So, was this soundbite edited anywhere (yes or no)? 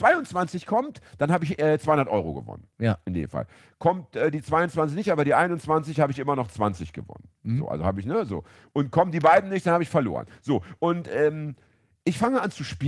no